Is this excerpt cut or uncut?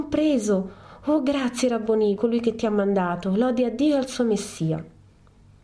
cut